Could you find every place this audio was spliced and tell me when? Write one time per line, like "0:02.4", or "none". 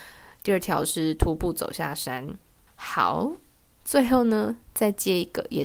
0:02.7